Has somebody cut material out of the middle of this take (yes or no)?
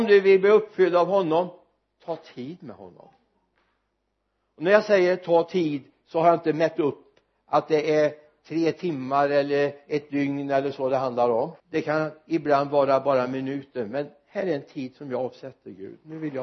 yes